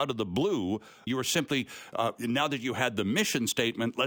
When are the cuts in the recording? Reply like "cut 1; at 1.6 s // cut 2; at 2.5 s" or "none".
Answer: cut 1; at 1.1 s